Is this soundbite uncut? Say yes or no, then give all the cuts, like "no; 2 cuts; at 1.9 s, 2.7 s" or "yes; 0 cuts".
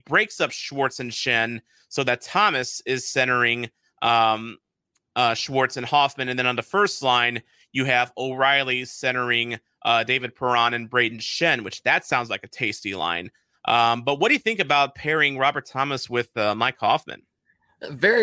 yes; 0 cuts